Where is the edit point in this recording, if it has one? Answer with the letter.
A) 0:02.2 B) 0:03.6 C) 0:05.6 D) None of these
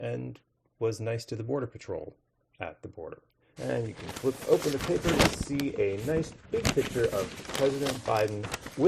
B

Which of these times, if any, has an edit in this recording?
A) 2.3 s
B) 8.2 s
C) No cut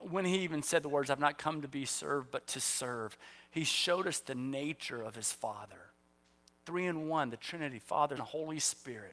B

